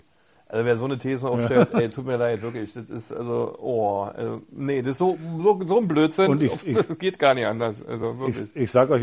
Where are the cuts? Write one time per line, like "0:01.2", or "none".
none